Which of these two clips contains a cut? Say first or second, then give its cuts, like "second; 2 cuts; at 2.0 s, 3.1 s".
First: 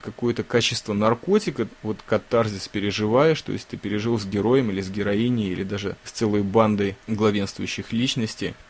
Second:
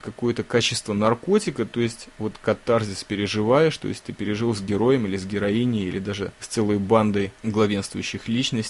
first; 1 cut; at 1.7 s